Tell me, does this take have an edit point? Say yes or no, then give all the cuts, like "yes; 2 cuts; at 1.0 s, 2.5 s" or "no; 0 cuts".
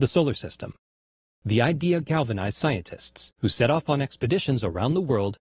yes; 1 cut; at 1.3 s